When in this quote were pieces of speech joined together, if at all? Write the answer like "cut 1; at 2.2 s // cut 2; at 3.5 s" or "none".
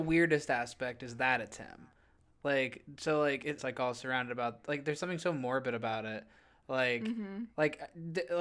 cut 1; at 3.6 s